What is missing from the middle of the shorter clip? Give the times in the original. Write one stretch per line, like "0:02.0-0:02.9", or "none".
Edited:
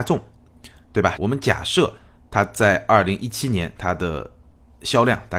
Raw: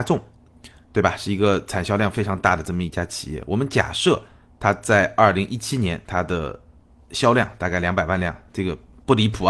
0:01.2-0:03.4